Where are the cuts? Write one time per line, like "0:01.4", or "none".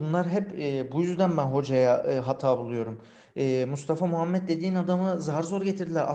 none